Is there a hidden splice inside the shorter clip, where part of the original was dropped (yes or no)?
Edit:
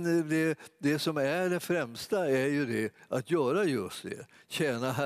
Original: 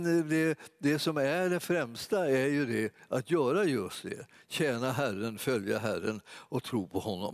no